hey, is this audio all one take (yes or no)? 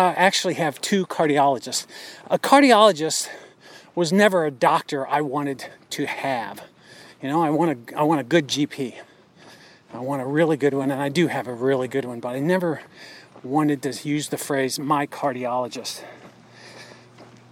yes